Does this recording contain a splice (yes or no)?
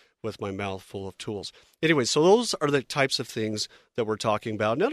no